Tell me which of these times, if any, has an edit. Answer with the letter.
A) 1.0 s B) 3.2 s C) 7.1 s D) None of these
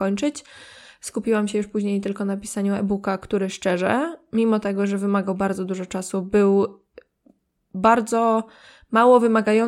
D